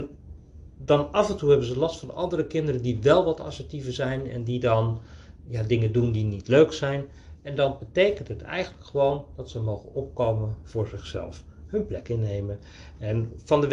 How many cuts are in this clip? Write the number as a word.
zero